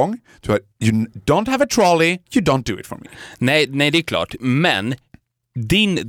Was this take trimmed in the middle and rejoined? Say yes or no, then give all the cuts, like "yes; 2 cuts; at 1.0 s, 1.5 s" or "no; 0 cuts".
yes; 1 cut; at 2.3 s